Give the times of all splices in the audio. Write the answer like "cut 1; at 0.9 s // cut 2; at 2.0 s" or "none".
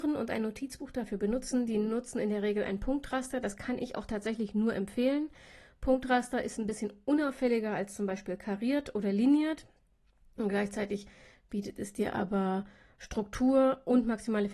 none